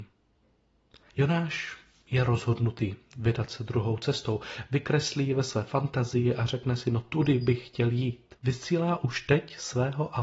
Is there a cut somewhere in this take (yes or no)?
yes